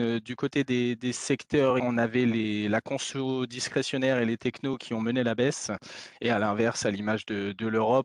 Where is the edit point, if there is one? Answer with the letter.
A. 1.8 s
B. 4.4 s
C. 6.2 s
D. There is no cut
A